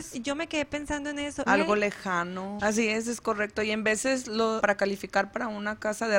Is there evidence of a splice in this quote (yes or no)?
yes